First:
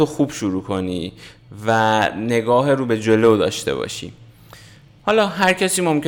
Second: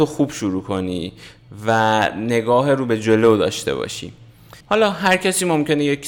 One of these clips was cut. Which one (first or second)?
second